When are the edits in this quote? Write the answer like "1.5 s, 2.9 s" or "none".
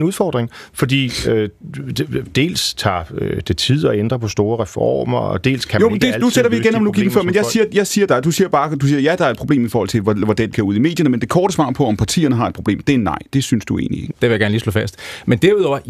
10.5 s, 14.1 s